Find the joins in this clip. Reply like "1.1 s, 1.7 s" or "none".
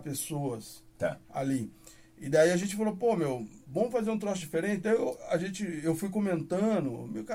3.6 s